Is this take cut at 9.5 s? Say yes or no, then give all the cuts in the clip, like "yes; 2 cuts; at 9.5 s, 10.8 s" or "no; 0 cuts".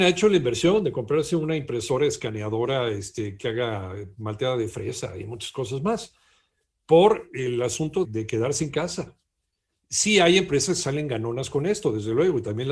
no; 1 cut; at 8.0 s